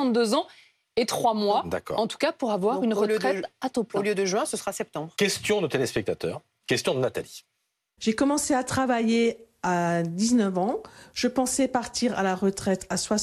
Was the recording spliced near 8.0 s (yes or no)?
yes